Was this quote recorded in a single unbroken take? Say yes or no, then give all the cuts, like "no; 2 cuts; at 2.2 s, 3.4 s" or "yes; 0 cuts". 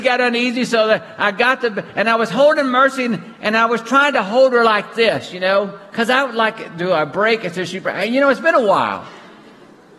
yes; 0 cuts